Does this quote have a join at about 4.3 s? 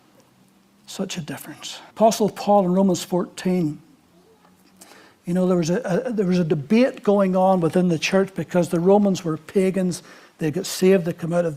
no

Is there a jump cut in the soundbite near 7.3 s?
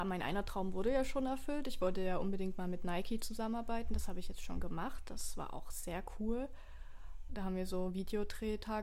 yes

